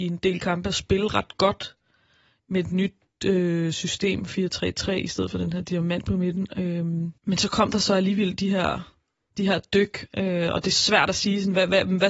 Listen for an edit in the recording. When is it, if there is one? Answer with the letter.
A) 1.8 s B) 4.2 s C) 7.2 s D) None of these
C